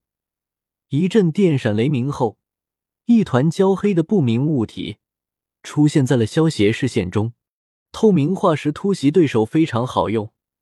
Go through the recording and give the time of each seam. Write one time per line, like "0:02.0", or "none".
0:07.8